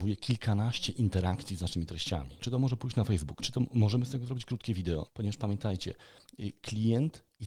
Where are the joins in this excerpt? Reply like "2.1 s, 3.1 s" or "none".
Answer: 2.4 s, 5.1 s